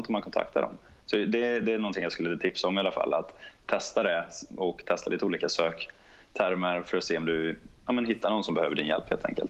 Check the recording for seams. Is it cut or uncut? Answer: uncut